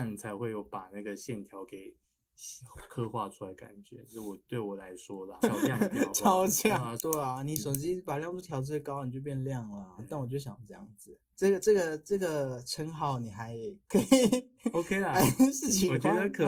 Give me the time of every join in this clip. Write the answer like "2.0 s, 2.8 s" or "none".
5.4 s, 7.0 s, 11.3 s